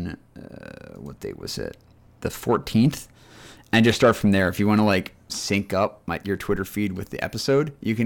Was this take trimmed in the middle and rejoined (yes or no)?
no